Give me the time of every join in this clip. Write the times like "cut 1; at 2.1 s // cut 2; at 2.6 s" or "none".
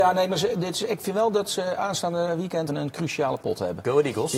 cut 1; at 2.7 s

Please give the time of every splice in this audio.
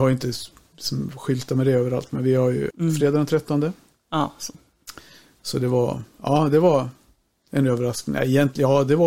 cut 1; at 2.7 s

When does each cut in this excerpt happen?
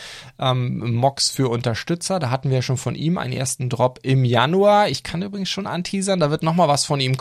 none

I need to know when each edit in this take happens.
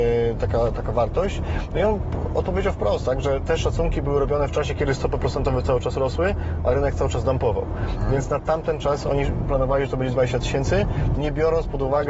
none

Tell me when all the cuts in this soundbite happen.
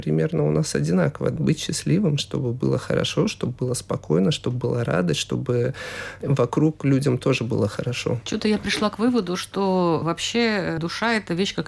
none

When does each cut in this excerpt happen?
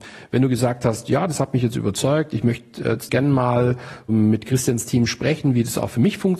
cut 1; at 3.1 s

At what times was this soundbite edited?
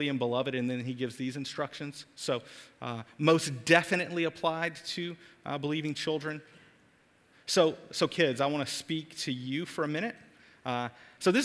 none

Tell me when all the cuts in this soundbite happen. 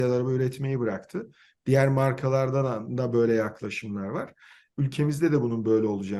cut 1; at 4.7 s

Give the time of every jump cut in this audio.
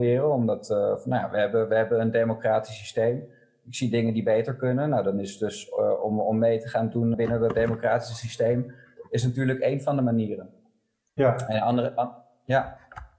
cut 1; at 7.1 s

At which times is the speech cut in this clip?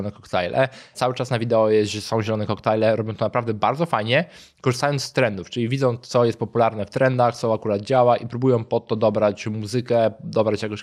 none

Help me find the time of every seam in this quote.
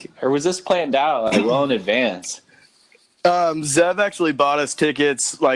none

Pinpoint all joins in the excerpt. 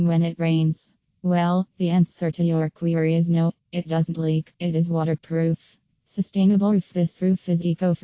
cut 1; at 6.0 s

